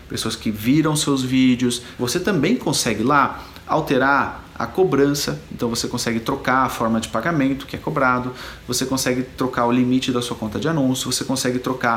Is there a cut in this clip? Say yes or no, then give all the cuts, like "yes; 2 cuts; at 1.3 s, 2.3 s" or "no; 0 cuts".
yes; 1 cut; at 2.0 s